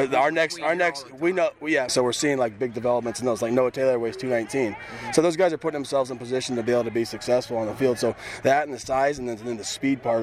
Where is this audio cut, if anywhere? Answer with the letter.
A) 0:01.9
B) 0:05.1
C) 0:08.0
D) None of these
A